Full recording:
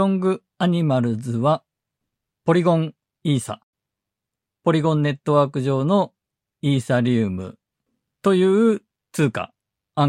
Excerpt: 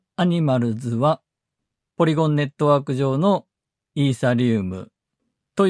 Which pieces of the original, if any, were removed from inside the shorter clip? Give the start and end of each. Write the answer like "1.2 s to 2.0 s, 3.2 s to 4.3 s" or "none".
2.3 s to 4.6 s